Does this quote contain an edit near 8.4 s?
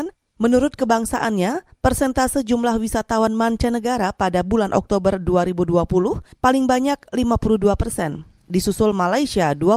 no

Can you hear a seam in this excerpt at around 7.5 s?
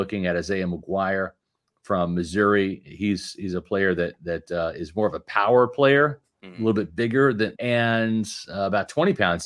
yes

